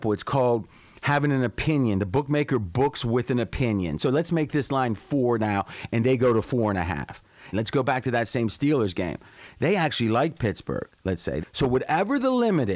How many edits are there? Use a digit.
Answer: 3